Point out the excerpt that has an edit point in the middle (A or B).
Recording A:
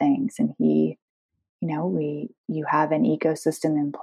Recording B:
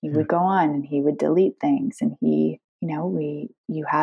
B